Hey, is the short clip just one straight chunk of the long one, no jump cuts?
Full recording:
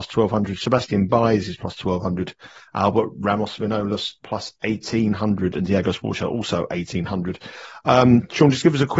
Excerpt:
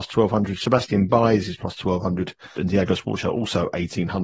no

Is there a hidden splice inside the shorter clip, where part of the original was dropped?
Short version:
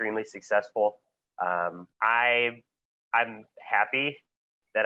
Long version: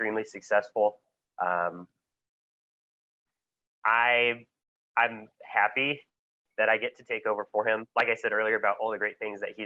yes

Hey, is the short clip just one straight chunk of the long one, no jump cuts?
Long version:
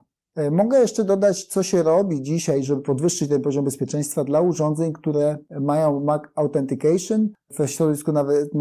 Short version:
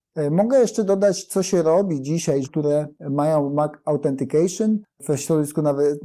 no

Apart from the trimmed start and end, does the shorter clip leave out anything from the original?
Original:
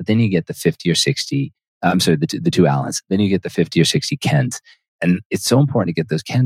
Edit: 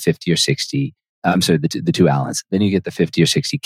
no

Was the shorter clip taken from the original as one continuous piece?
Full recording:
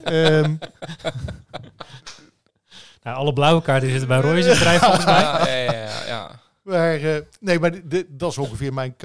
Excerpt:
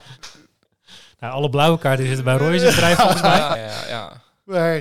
no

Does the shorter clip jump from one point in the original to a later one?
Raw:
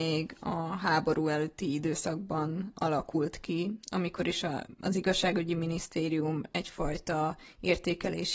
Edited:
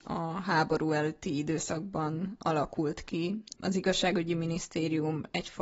yes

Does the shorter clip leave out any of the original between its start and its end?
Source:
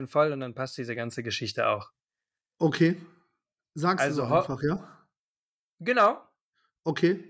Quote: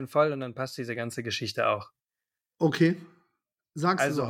no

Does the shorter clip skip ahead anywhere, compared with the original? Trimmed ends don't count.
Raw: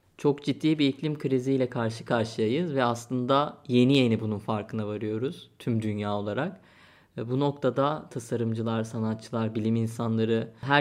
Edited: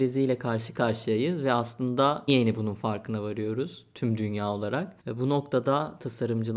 yes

